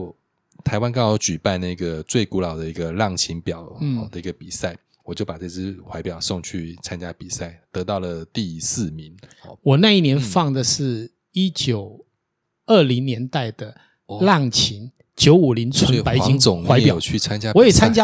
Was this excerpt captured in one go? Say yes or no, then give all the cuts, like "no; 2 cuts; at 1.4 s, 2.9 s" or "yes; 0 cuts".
yes; 0 cuts